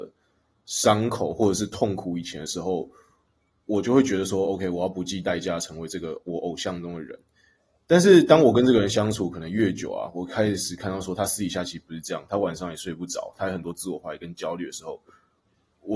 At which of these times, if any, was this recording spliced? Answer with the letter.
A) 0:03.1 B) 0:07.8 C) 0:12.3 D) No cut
D